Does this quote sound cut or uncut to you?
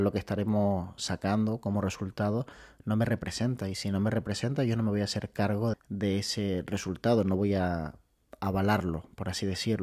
cut